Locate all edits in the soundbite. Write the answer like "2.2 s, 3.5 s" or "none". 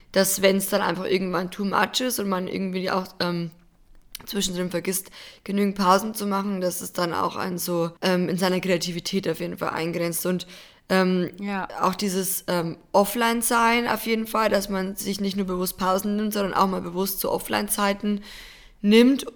8.0 s